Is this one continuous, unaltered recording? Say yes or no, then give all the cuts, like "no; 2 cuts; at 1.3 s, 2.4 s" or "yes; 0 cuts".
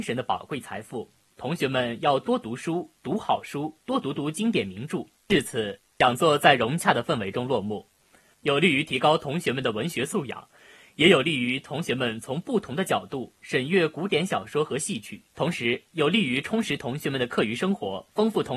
no; 3 cuts; at 5.1 s, 8.3 s, 15.3 s